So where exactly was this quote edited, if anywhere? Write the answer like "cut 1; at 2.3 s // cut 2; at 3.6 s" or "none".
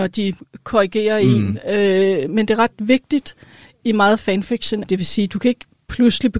cut 1; at 2.3 s // cut 2; at 4.8 s